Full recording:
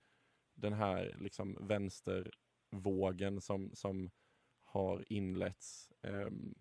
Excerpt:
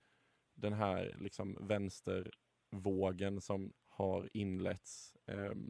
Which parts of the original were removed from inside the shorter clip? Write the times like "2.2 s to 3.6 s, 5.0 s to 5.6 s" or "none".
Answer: 3.7 s to 4.5 s